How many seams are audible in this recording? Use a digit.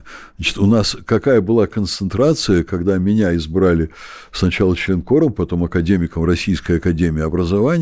0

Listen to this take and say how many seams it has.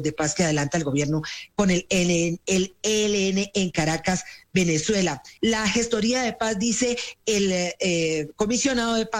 1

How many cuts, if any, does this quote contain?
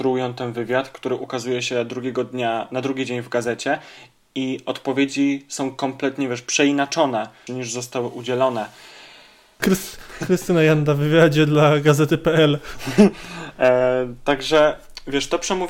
2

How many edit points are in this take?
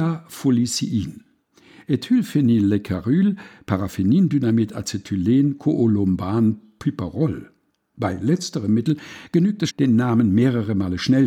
1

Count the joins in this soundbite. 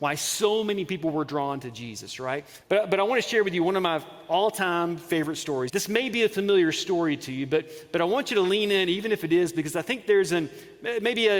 2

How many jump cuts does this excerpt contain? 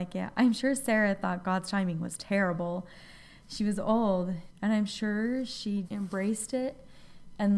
2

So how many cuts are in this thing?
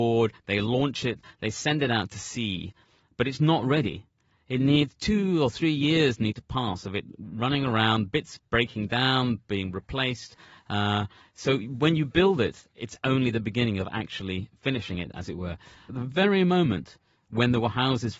1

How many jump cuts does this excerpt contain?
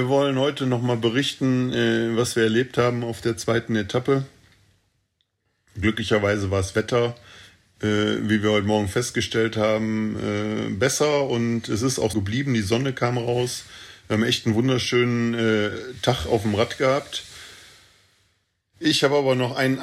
1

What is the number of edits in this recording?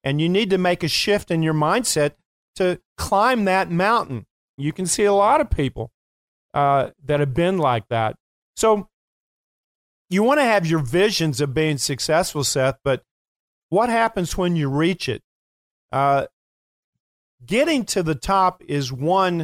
1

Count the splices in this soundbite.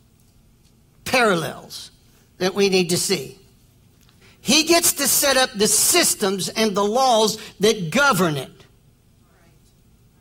1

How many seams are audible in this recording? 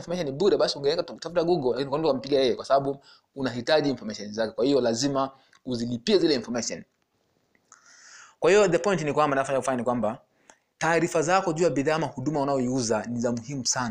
0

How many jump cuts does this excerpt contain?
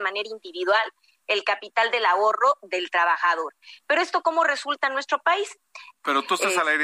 1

